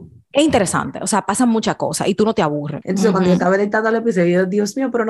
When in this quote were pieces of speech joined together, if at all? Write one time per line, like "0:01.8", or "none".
0:02.8